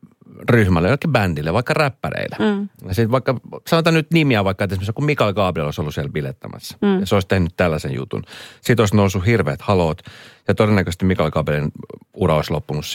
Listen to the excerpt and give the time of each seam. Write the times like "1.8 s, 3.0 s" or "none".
none